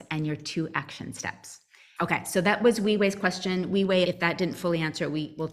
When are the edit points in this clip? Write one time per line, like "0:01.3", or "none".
0:02.0
0:04.0